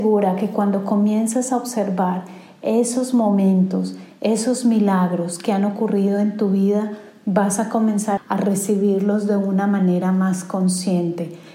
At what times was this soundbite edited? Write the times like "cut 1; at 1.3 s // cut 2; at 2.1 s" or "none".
cut 1; at 8.2 s

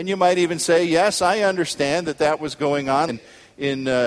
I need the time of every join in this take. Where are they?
cut 1; at 3.1 s

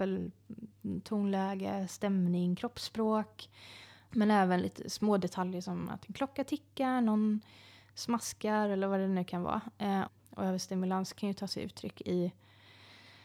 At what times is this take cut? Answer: cut 1; at 4.1 s // cut 2; at 10.1 s

